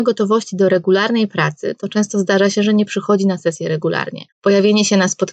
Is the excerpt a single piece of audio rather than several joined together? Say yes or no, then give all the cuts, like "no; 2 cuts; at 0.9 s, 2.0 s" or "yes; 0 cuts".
no; 1 cut; at 4.3 s